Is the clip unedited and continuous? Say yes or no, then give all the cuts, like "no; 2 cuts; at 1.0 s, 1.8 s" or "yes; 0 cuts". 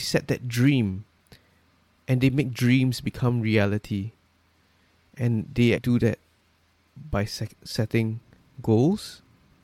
no; 1 cut; at 5.8 s